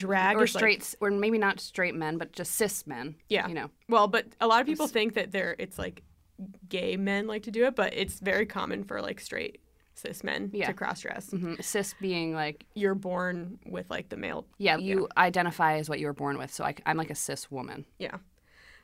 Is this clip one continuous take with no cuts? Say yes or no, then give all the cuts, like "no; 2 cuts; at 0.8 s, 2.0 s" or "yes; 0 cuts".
no; 2 cuts; at 12.7 s, 14.8 s